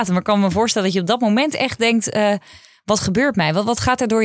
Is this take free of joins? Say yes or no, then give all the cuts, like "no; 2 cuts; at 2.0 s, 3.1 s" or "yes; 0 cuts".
yes; 0 cuts